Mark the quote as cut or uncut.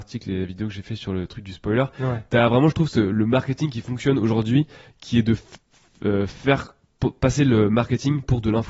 uncut